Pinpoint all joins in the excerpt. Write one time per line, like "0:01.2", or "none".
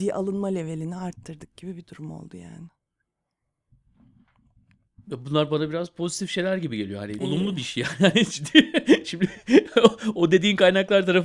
0:07.2